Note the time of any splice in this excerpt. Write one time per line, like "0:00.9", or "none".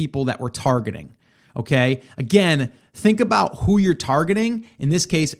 none

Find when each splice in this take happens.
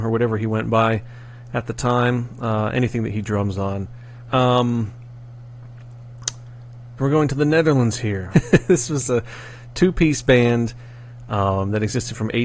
0:04.3
0:07.0
0:08.3

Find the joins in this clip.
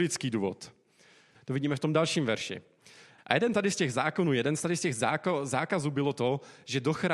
0:01.4
0:03.2

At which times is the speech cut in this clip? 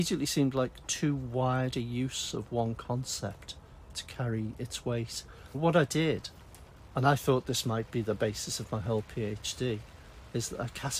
0:05.5

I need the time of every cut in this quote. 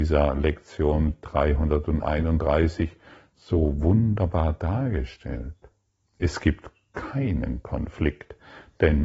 none

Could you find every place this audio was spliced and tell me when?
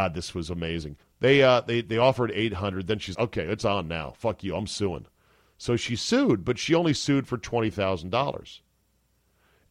0:01.0
0:03.1

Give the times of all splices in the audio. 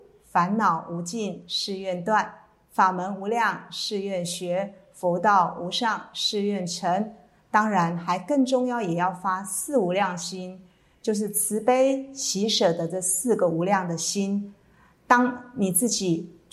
none

